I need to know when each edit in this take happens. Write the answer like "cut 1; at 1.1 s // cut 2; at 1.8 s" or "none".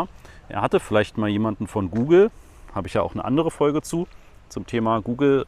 none